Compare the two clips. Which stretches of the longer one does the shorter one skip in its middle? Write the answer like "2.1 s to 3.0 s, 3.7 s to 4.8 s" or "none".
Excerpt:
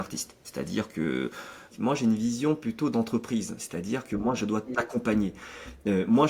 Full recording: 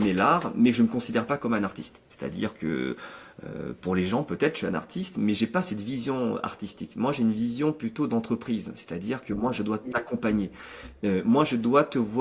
3.4 s to 6.9 s

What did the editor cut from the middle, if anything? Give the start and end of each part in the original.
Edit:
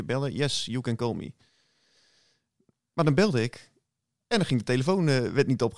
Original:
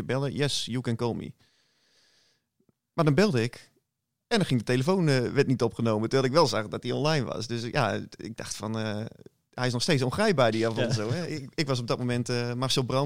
none

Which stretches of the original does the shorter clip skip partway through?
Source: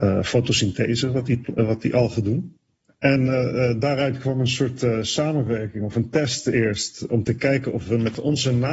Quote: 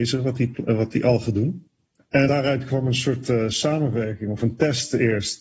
3.2 s to 3.8 s

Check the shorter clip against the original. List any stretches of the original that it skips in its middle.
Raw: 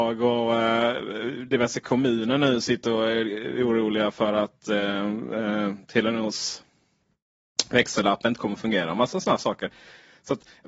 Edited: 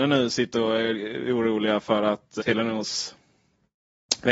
4.7 s to 5.9 s

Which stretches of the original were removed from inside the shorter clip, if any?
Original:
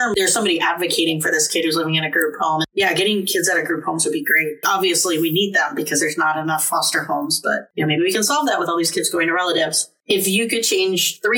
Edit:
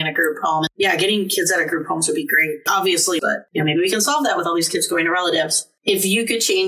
5.2 s to 7.4 s

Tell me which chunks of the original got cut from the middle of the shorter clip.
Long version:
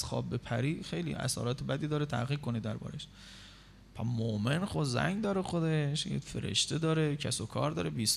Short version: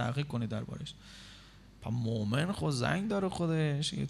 none

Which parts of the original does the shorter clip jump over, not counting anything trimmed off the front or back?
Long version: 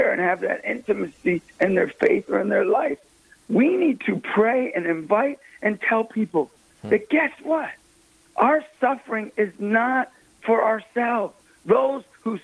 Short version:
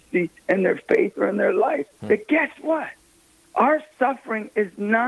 3.1 s to 6.8 s

